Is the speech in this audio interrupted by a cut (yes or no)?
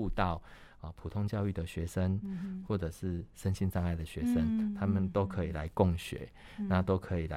no